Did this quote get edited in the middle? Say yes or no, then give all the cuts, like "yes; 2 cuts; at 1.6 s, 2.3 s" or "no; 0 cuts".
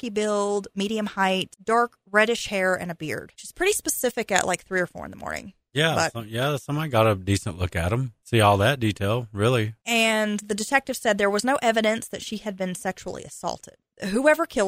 no; 0 cuts